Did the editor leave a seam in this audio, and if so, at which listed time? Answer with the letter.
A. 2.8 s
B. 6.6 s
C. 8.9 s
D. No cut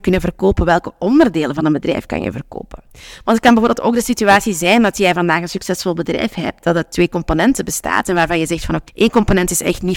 C